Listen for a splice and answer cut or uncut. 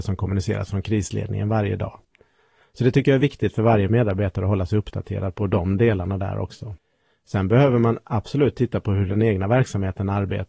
uncut